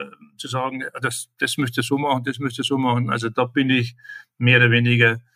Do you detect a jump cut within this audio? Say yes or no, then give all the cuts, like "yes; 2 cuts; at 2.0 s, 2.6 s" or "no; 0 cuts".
no; 0 cuts